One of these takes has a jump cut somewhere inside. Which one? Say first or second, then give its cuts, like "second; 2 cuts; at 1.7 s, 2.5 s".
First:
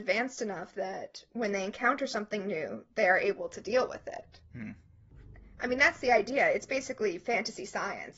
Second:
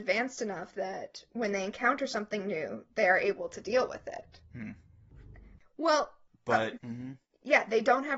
second; 2 cuts; at 5.6 s, 6.8 s